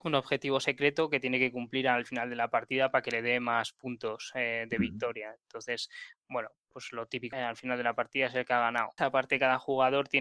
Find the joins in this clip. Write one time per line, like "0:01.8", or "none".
0:07.3
0:09.0